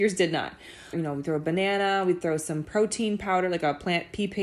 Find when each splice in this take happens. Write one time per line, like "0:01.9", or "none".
0:00.9